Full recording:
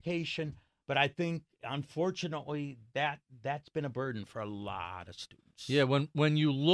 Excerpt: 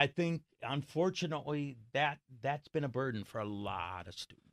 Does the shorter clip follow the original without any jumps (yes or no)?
yes